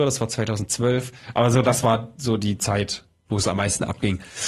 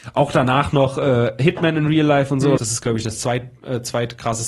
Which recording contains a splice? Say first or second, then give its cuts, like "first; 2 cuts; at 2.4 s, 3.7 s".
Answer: second; 1 cut; at 2.6 s